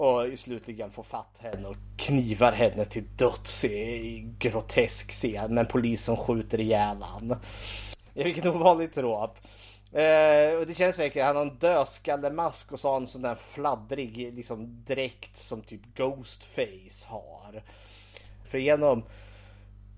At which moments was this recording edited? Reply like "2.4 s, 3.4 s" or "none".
8.0 s, 18.4 s